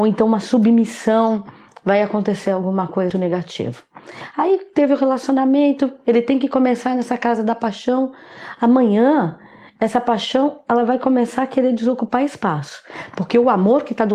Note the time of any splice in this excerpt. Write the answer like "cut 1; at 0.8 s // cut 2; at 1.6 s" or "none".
cut 1; at 3.1 s